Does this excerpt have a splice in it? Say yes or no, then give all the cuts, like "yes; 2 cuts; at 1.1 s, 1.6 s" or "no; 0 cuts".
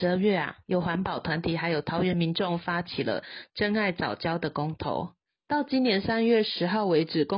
no; 0 cuts